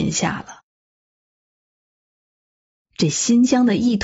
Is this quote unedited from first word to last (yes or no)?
yes